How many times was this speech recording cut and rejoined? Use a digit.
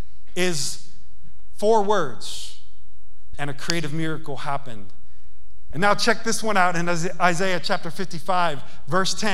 2